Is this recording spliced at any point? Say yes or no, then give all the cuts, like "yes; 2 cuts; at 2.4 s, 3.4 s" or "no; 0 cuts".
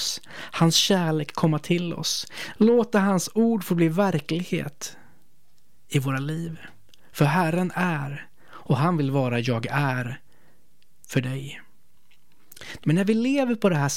yes; 1 cut; at 12.8 s